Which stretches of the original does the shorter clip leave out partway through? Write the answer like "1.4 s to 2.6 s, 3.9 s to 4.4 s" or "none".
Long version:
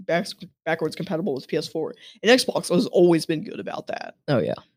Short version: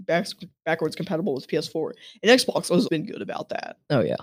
2.9 s to 3.3 s